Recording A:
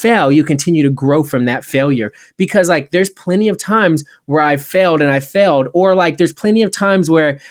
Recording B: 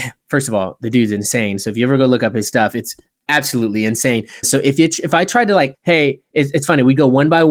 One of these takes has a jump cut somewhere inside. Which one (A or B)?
B